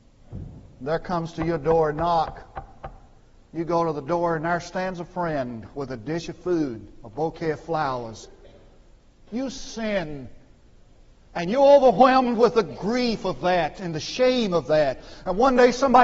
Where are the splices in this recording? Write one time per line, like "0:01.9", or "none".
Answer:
0:09.3